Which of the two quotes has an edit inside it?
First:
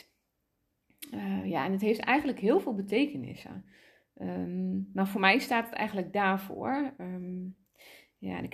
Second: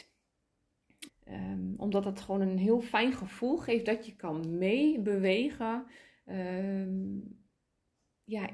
second; 1 cut; at 1.1 s

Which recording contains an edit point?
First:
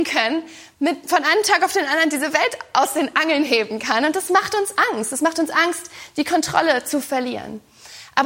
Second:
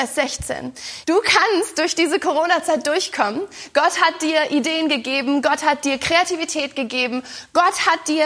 second; 1 cut; at 1.0 s

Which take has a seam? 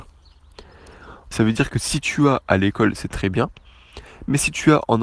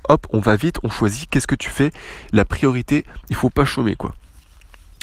first; 1 cut; at 1.3 s

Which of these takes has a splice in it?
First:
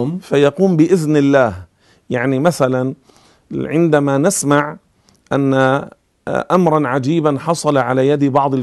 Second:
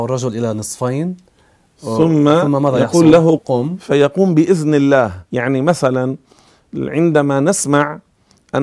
second; 2 cuts; at 3.4 s, 5.3 s

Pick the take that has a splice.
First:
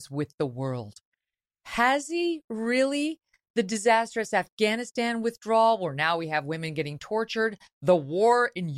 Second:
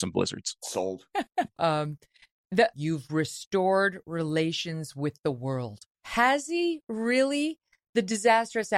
second; 3 cuts; at 1.6 s, 2.7 s, 5.9 s

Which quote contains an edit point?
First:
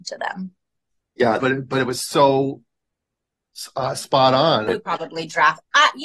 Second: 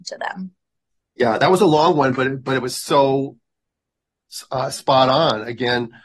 first; 2 cuts; at 1.4 s, 4.7 s

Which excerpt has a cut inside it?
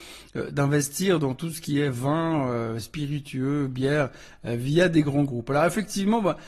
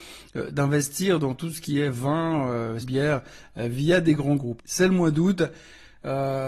second; 2 cuts; at 2.8 s, 4.6 s

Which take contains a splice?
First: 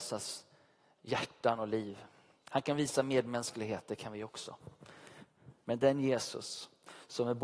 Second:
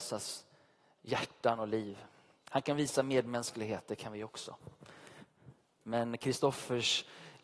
first; 1 cut; at 5.6 s

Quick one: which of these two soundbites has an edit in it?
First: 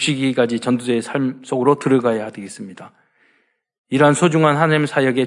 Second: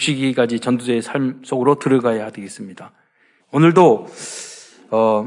second; 1 cut; at 3.4 s

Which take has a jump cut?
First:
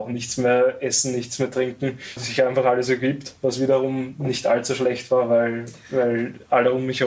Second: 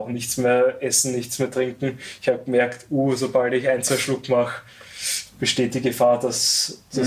first; 1 cut; at 2.2 s

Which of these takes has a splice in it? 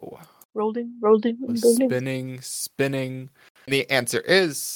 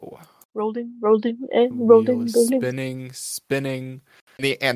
first; 1 cut; at 1.5 s

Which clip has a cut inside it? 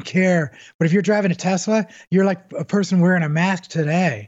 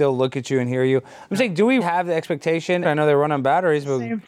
second; 2 cuts; at 1.8 s, 2.8 s

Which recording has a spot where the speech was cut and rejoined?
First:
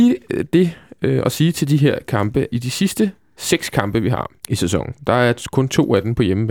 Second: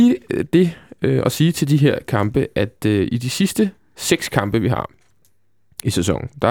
first; 2 cuts; at 2.5 s, 4.4 s

